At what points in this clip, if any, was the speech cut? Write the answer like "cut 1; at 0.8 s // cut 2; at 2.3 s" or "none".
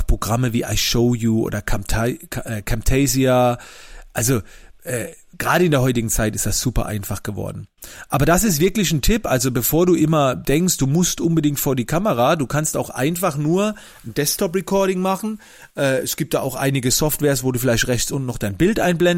none

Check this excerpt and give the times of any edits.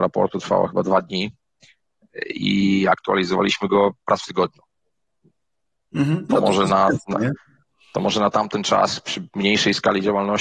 none

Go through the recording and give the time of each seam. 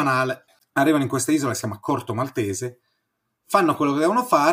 none

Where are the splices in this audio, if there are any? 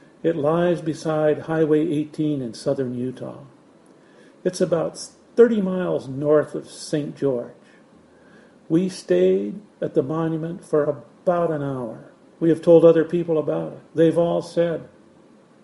cut 1; at 12.3 s // cut 2; at 13.9 s

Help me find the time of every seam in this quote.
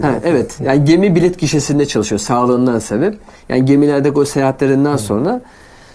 none

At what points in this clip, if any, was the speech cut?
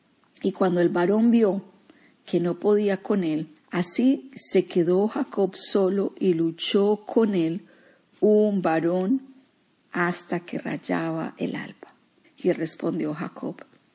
cut 1; at 3.6 s // cut 2; at 12.2 s

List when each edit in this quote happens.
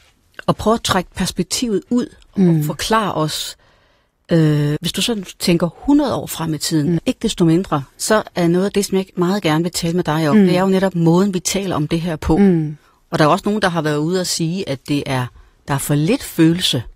cut 1; at 4.8 s // cut 2; at 7.0 s

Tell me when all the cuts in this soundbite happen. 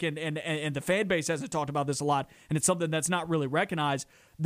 none

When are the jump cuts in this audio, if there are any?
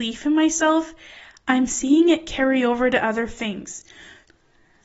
none

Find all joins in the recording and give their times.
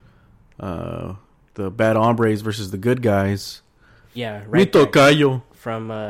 cut 1; at 4.1 s

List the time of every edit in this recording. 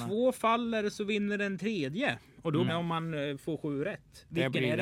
cut 1; at 2.7 s

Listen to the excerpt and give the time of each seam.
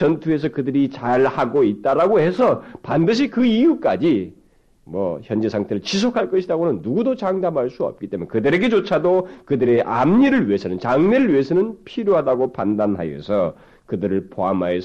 none

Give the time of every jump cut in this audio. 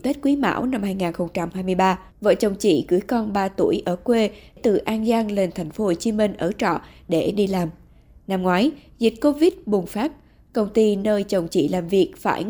cut 1; at 2.1 s

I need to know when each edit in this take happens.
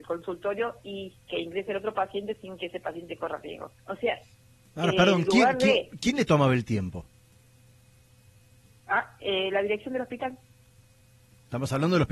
cut 1; at 3.8 s

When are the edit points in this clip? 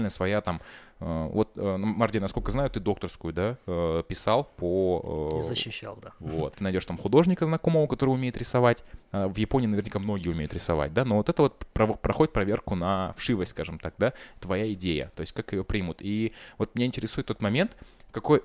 cut 1; at 6.5 s

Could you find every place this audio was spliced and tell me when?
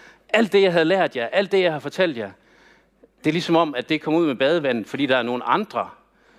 none

